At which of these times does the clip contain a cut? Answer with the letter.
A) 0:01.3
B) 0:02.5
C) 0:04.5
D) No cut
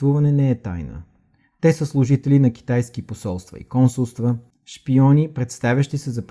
C